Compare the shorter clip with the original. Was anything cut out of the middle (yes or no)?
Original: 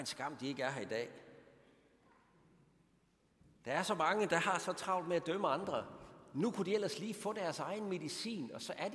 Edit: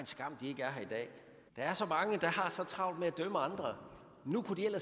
yes